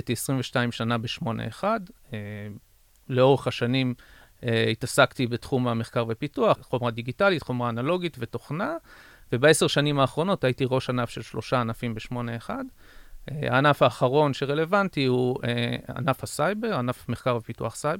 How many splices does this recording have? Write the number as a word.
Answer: one